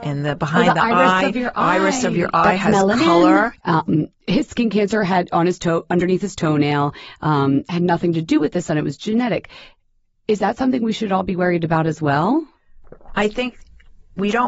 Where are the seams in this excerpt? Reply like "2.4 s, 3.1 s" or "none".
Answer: 3.6 s